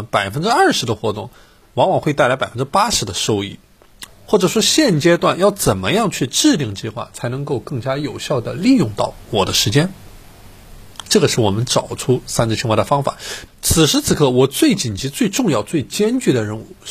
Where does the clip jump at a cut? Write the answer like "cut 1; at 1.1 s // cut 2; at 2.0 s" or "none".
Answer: cut 1; at 4.1 s // cut 2; at 13.5 s

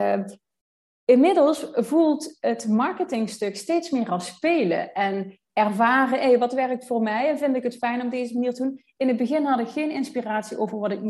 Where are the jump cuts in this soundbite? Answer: none

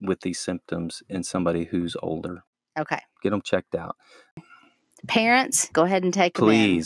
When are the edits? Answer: cut 1; at 2.7 s // cut 2; at 5.7 s

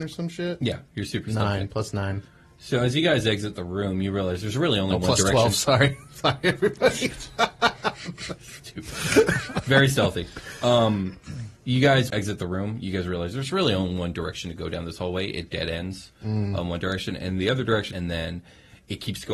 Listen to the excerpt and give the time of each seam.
cut 1; at 12.1 s // cut 2; at 17.9 s

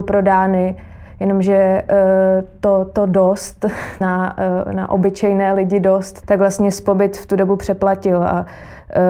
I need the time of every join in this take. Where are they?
cut 1; at 4.0 s // cut 2; at 6.2 s

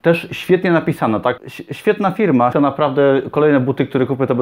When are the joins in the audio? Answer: cut 1; at 1.4 s // cut 2; at 2.5 s

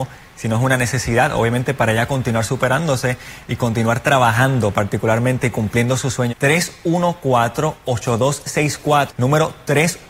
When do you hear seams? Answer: cut 1; at 6.3 s // cut 2; at 9.1 s

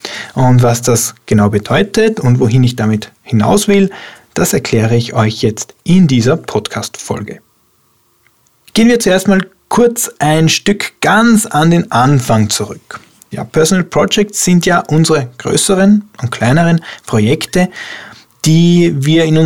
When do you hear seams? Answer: cut 1; at 13.3 s

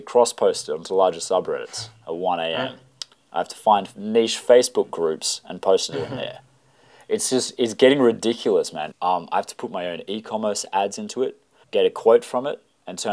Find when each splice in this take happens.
cut 1; at 8.9 s // cut 2; at 11.6 s

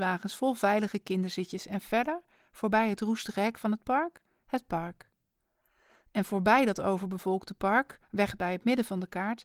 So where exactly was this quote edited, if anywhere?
none

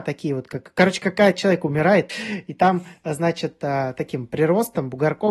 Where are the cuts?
cut 1; at 2.1 s

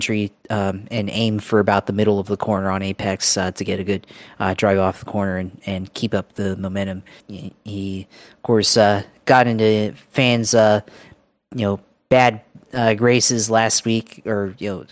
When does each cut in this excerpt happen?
cut 1; at 7.2 s

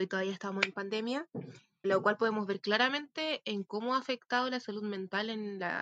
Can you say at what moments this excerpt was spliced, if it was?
cut 1; at 1.8 s

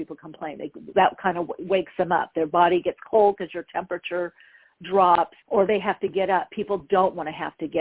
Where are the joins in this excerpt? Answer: cut 1; at 0.9 s // cut 2; at 5.4 s

